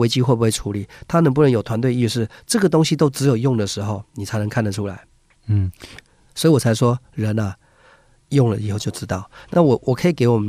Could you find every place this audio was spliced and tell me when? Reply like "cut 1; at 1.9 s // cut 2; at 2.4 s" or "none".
none